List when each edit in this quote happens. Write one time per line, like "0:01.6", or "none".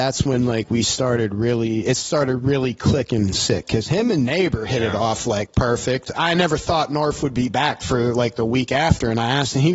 0:06.1